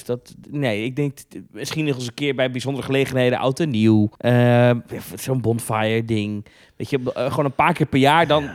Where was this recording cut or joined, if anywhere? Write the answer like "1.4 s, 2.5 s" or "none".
4.2 s